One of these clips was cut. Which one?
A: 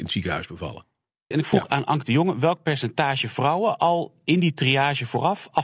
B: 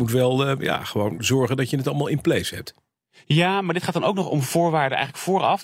A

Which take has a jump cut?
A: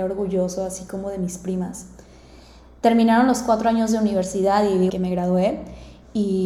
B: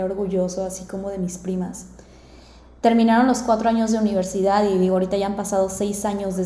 A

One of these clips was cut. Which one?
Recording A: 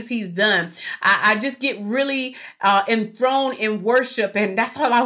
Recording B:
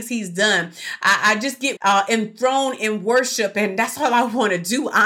B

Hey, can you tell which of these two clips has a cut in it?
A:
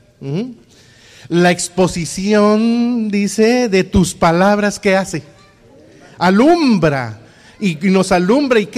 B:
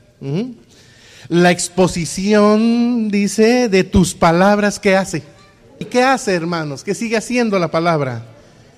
B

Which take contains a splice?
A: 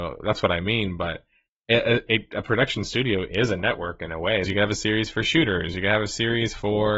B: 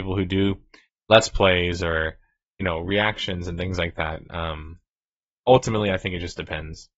A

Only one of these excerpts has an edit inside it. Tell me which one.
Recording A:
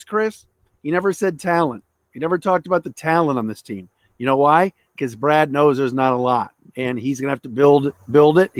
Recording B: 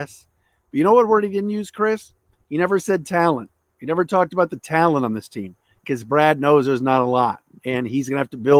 B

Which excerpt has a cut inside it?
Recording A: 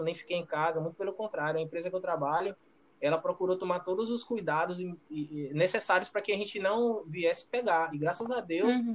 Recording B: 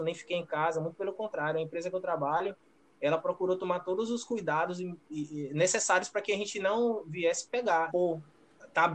B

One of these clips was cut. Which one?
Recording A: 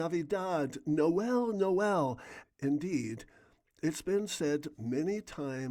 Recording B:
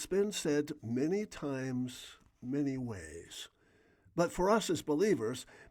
A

